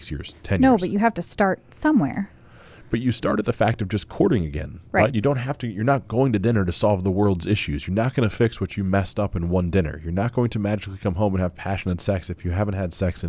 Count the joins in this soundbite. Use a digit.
0